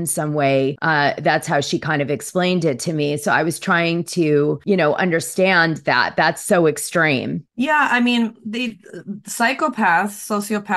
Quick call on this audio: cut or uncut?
uncut